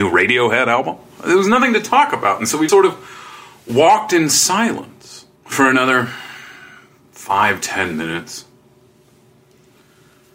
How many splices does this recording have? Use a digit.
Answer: 2